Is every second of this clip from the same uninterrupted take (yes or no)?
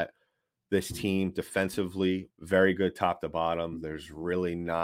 no